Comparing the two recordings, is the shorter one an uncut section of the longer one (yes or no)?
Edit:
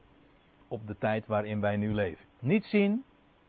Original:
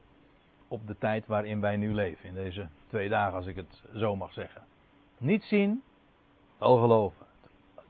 no